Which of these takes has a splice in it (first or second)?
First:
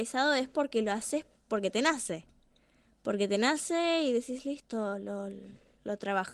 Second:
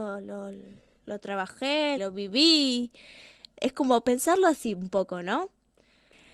second